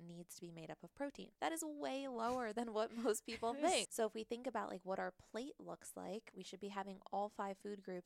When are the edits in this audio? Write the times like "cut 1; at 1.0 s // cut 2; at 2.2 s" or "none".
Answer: cut 1; at 1.3 s // cut 2; at 3.8 s